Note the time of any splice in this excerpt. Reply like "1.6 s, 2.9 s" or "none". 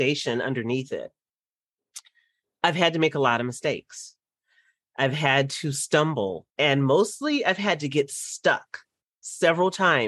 6.5 s